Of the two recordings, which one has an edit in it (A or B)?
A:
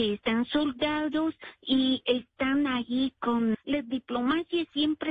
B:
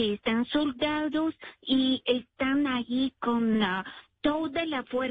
A